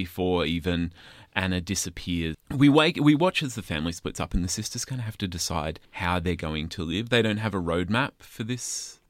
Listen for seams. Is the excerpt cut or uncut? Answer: cut